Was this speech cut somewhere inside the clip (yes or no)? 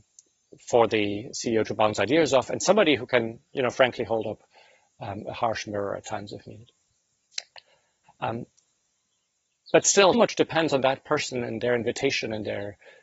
yes